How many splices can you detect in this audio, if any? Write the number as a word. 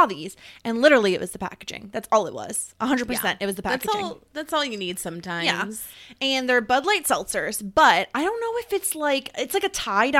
zero